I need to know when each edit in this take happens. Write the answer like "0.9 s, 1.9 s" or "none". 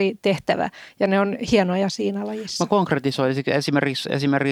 none